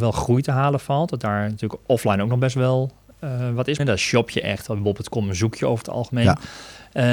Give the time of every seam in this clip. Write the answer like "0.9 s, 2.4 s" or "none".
3.8 s